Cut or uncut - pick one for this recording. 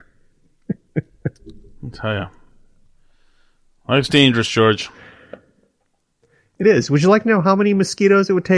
uncut